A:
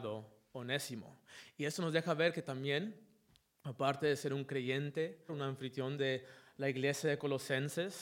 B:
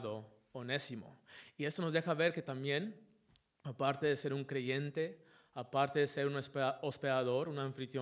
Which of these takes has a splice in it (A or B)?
A